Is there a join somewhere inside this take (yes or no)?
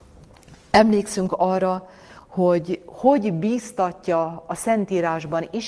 no